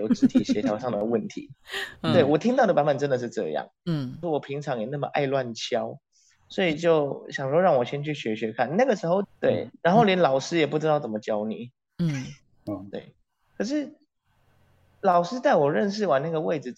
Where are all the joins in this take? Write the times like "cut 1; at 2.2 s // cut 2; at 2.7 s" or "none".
cut 1; at 4.2 s // cut 2; at 9.2 s